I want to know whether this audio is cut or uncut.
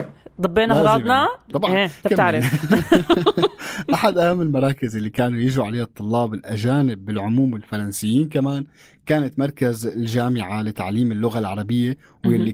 cut